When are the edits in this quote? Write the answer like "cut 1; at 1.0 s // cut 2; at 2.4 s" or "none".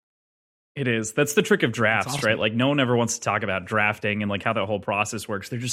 none